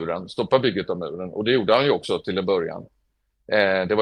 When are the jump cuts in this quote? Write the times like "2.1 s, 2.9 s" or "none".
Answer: none

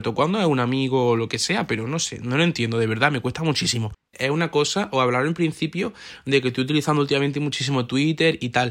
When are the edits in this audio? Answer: 4.1 s

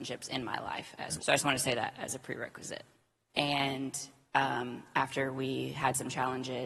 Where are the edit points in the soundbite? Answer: 1.2 s, 3.3 s

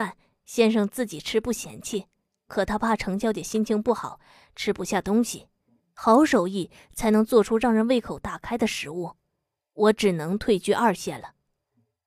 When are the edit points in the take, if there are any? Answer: none

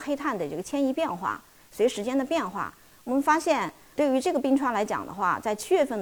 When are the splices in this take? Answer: none

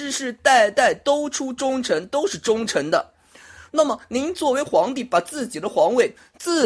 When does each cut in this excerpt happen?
3.7 s

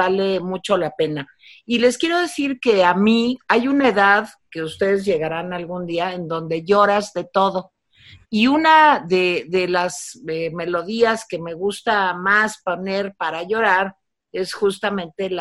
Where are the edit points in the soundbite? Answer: 3.4 s, 8.2 s

